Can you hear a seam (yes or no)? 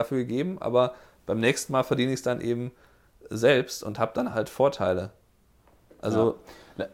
no